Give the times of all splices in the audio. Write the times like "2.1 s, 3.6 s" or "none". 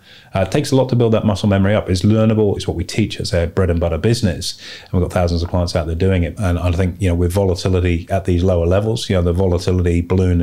2.6 s, 6.4 s